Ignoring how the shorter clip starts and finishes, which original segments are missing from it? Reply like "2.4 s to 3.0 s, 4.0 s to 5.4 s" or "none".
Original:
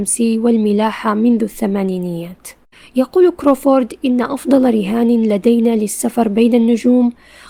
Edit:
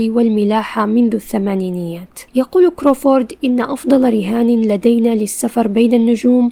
2.6 s to 2.9 s